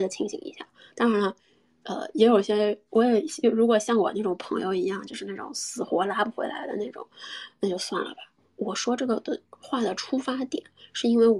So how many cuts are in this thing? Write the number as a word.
one